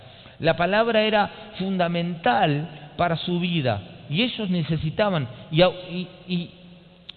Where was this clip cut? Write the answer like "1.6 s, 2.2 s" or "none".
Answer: none